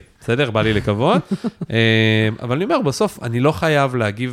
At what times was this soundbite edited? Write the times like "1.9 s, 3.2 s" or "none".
none